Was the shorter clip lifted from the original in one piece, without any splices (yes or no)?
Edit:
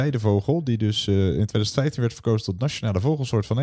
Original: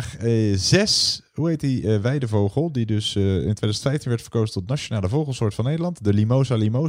yes